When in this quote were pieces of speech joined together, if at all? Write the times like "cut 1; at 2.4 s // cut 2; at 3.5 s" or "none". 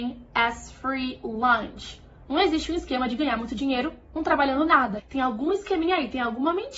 cut 1; at 2.3 s // cut 2; at 5.0 s